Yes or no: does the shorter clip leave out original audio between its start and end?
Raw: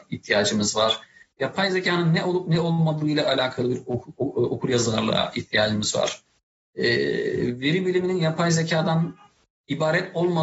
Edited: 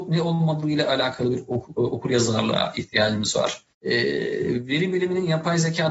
yes